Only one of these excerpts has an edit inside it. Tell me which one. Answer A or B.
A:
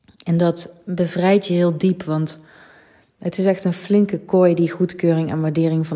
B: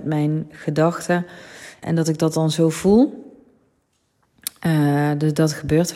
B